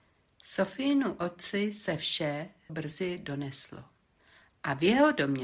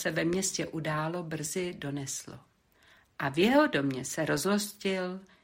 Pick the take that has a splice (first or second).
first